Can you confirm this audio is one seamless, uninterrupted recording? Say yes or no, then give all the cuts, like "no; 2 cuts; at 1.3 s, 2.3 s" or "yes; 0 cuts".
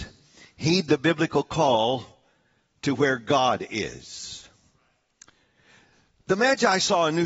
yes; 0 cuts